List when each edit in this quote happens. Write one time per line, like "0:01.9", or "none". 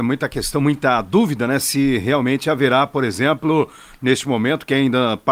none